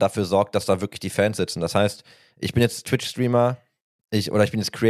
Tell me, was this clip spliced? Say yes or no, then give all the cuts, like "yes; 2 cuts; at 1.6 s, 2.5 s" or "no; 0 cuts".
no; 0 cuts